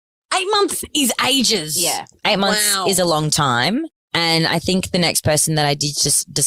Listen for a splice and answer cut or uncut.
uncut